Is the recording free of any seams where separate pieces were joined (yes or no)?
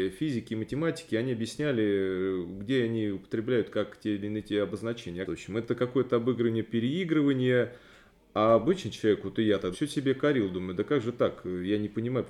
no